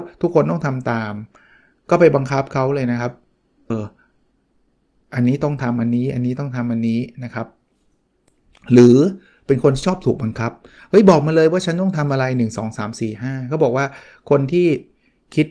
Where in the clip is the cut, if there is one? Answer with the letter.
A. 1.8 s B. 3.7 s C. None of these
B